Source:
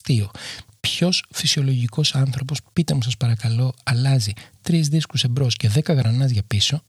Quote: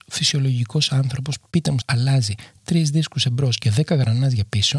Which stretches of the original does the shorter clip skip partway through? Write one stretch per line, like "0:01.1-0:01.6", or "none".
0:03.0-0:03.8